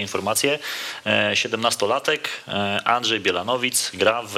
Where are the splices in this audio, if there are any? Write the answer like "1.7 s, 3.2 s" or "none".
none